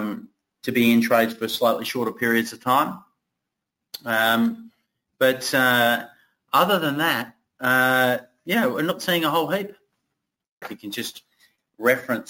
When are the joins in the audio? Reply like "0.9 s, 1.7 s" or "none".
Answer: 10.6 s

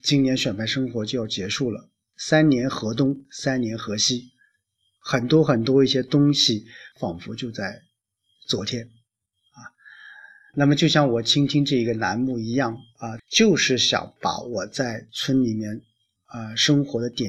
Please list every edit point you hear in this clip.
6.9 s, 13.2 s

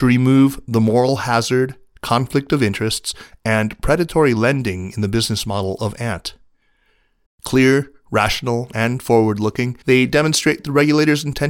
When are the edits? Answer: 7.3 s, 9.8 s

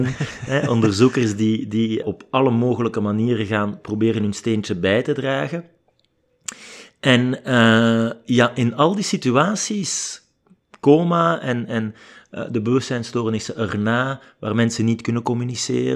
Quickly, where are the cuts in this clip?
2.0 s

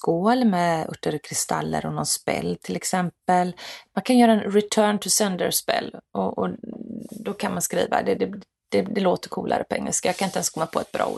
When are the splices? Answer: 3.9 s

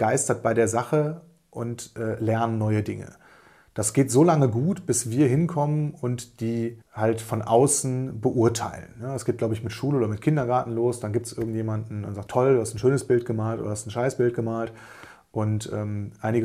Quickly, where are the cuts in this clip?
6.8 s, 12.3 s

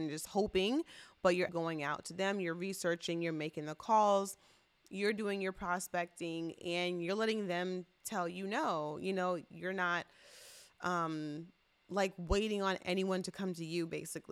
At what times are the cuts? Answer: 1.5 s

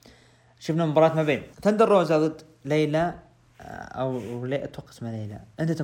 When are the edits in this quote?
1.5 s

